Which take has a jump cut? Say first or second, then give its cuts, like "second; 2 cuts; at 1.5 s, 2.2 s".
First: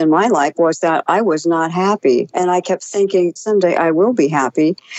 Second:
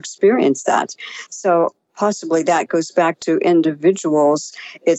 first; 2 cuts; at 2.3 s, 3.4 s